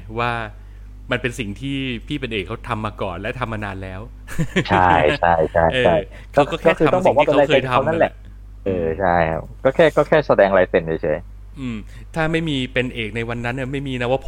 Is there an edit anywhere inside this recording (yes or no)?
yes